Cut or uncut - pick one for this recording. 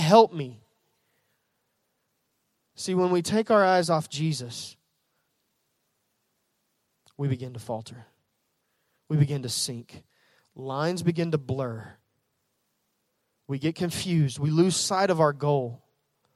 uncut